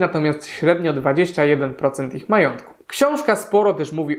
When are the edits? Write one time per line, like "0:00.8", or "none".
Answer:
none

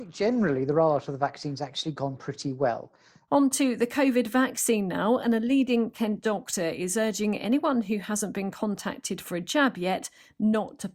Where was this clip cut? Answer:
0:03.3

